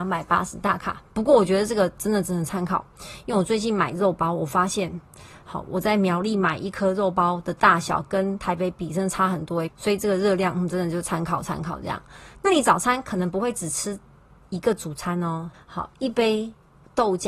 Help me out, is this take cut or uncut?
cut